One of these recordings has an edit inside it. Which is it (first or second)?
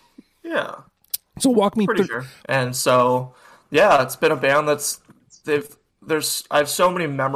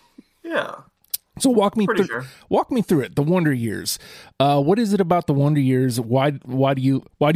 first